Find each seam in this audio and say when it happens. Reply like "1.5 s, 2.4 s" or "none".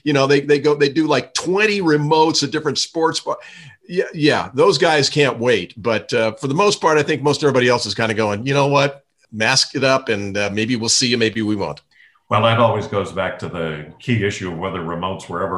none